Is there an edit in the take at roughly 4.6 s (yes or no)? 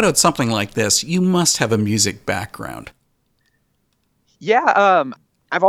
no